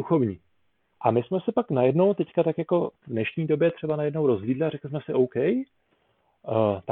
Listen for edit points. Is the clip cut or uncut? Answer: cut